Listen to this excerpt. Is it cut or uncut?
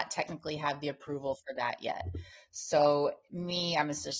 uncut